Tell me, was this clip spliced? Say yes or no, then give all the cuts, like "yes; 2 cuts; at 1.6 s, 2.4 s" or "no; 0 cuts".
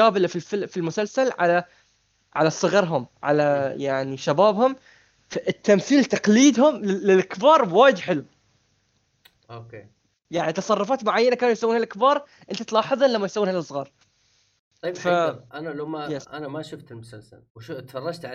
no; 0 cuts